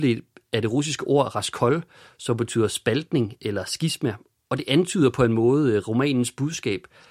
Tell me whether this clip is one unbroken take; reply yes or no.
yes